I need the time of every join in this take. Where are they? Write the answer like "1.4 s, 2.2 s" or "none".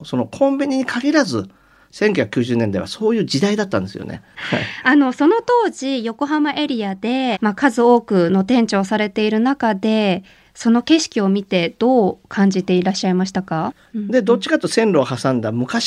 7.3 s, 13.9 s